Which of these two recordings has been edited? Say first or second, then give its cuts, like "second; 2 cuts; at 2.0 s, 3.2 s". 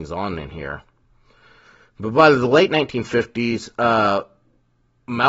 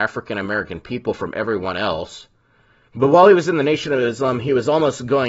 second; 1 cut; at 2.9 s